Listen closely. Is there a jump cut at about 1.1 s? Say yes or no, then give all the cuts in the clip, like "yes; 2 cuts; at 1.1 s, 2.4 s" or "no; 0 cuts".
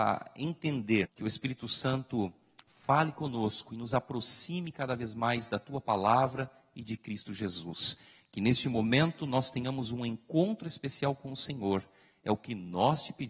yes; 1 cut; at 1.1 s